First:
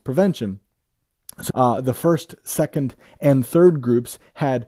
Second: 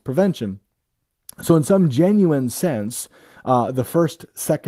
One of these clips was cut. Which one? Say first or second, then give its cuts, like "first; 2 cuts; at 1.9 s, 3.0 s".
first; 1 cut; at 1.5 s